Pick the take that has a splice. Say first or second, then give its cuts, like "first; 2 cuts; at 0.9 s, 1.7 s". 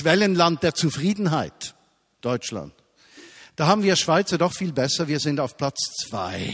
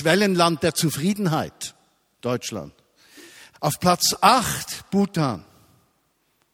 second; 1 cut; at 3.5 s